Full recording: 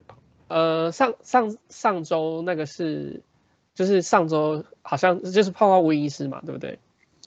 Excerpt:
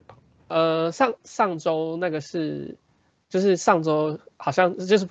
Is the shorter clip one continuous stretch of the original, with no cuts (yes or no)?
no